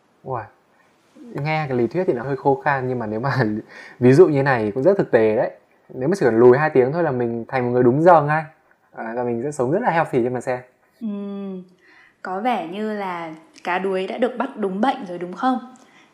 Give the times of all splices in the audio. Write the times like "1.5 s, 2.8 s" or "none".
2.2 s